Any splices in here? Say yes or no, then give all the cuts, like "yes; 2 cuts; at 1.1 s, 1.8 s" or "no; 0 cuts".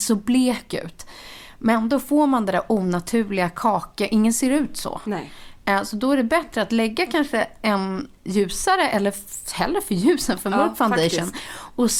no; 0 cuts